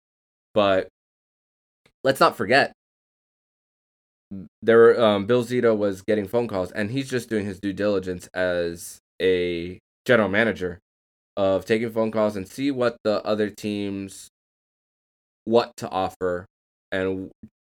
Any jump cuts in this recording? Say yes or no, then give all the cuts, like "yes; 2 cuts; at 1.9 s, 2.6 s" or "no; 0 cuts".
no; 0 cuts